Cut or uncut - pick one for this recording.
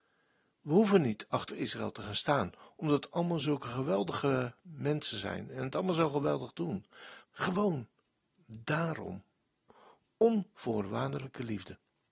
cut